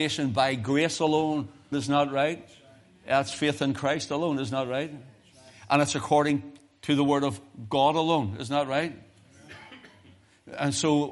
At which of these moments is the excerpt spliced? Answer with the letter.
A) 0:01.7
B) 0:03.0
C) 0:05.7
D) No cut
A